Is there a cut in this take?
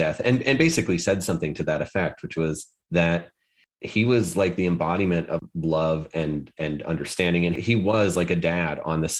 no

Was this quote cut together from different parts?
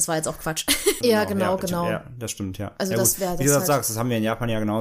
yes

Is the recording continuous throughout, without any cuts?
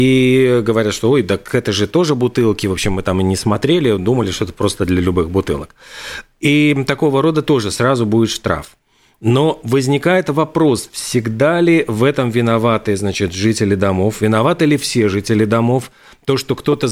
yes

